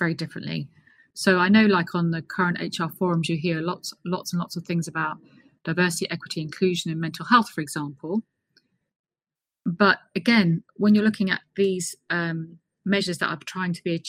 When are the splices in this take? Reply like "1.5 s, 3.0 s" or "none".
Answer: 1.0 s